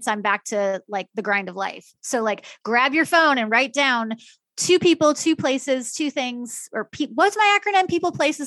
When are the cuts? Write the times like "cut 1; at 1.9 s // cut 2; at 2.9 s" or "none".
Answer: none